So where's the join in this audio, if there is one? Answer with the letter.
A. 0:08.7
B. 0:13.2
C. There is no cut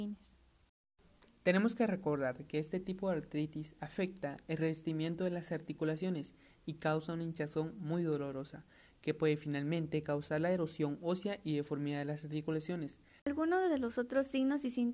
B